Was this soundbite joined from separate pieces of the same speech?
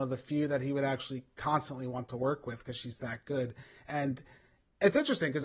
no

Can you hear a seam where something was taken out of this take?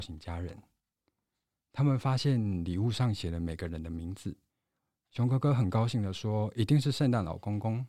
no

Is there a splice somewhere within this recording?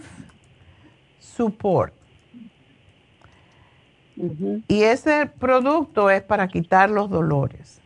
no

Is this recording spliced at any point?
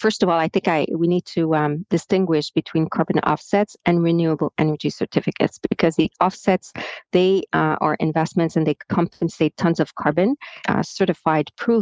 yes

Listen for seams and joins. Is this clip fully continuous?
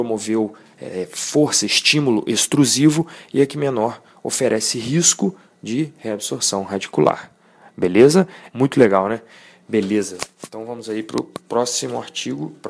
no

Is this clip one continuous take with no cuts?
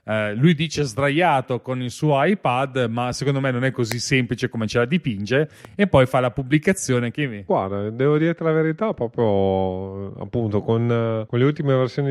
yes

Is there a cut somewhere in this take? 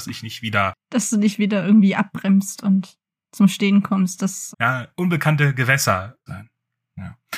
yes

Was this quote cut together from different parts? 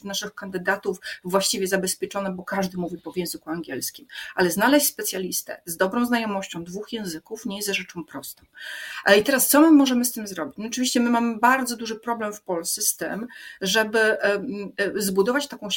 no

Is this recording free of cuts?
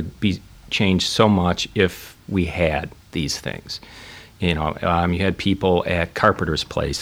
yes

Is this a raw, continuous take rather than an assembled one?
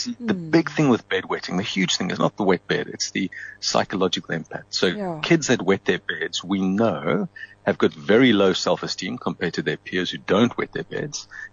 yes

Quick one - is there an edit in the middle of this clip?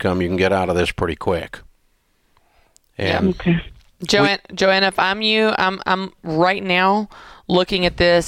no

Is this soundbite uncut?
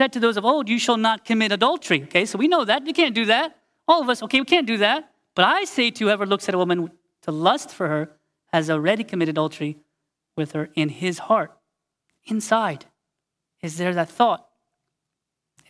yes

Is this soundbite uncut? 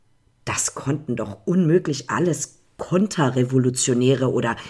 yes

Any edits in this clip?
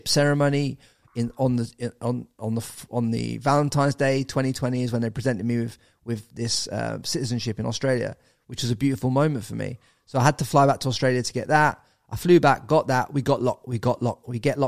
no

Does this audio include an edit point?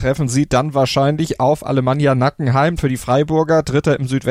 yes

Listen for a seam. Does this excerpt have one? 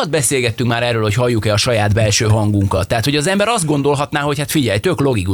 no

